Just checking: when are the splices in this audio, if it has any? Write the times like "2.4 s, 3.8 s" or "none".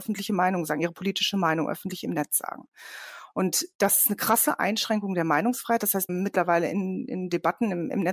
6.1 s